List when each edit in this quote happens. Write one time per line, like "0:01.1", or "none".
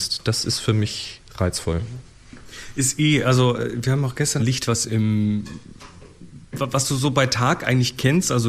0:04.4